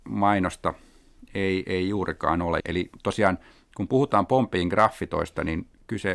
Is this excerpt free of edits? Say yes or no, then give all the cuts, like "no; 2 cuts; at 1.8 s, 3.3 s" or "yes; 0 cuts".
no; 1 cut; at 2.6 s